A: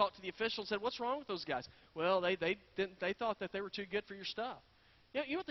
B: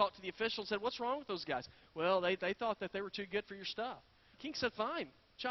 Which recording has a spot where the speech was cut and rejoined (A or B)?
B